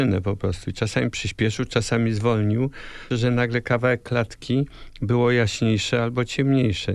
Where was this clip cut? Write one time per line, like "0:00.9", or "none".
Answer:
0:03.1